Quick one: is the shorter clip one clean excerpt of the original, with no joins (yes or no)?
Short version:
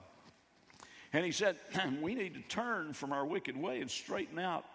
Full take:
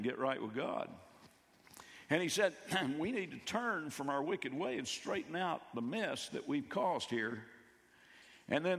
yes